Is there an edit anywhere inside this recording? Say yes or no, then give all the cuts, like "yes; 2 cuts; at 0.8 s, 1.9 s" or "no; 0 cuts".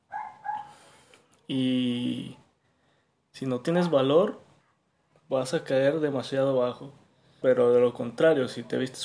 yes; 1 cut; at 7.4 s